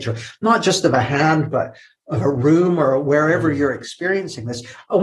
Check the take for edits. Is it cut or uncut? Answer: uncut